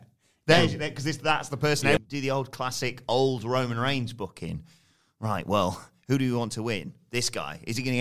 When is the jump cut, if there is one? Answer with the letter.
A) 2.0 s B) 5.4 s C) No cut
A